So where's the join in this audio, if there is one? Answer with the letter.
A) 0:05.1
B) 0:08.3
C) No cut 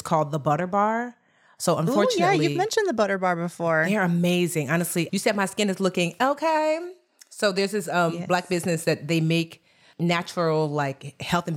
A